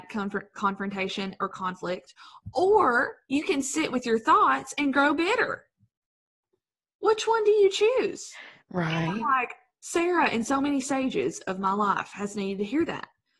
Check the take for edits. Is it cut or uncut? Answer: uncut